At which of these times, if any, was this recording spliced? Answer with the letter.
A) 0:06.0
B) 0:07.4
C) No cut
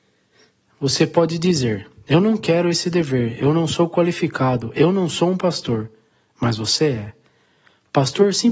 C